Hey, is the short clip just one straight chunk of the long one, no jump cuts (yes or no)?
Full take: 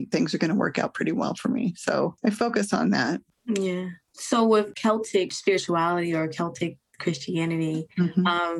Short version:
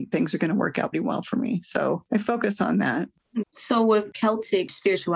no